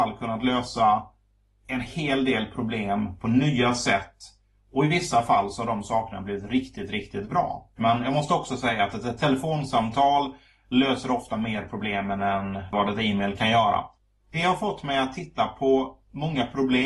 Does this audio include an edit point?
yes; 1 cut; at 7.8 s

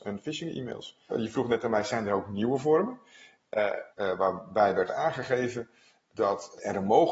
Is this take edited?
yes; 2 cuts; at 1.1 s, 3.9 s

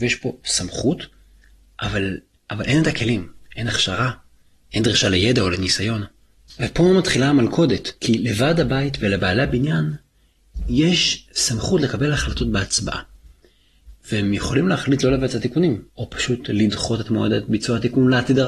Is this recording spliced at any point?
yes; 2 cuts; at 8.0 s, 15.9 s

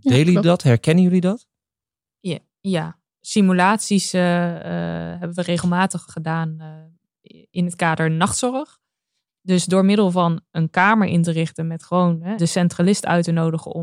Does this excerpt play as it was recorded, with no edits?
no; 3 cuts; at 6.1 s, 9.3 s, 12.4 s

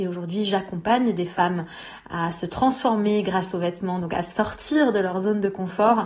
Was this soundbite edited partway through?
no; 0 cuts

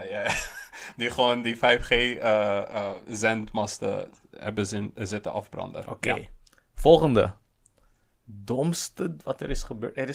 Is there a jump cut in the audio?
no; 0 cuts

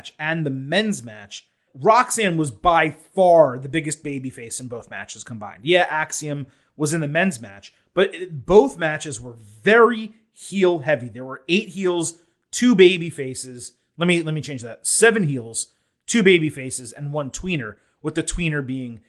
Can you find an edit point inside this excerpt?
yes; 1 cut; at 1.7 s

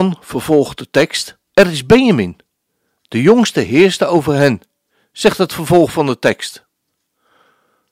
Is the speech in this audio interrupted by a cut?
yes; 1 cut; at 1.5 s

